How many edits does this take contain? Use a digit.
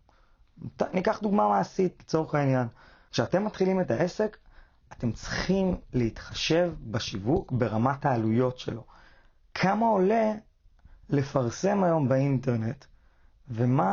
1